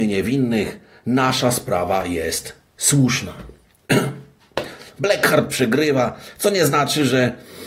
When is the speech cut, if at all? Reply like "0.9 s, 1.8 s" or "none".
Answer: none